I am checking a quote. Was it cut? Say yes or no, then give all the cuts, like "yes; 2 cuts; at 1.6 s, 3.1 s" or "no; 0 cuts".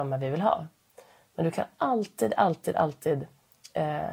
no; 0 cuts